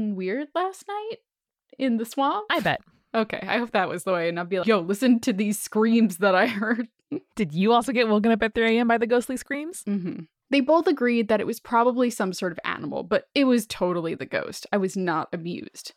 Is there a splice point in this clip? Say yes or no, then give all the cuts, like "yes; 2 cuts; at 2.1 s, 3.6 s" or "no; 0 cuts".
yes; 1 cut; at 4.6 s